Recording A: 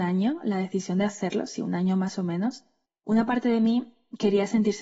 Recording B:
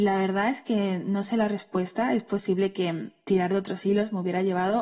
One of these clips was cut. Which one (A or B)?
A